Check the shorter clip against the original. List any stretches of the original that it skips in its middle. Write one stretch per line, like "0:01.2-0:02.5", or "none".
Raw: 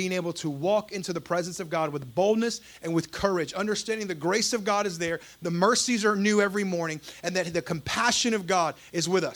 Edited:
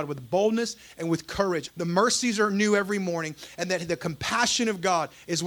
0:03.5-0:05.3